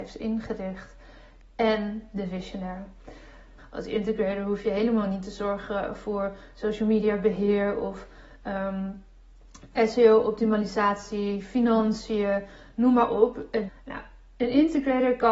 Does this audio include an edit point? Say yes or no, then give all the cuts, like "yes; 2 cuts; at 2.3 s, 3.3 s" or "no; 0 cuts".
yes; 2 cuts; at 3.6 s, 13.7 s